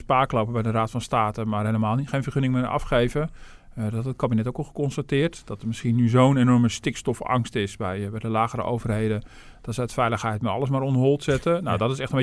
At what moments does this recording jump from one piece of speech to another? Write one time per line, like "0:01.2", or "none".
none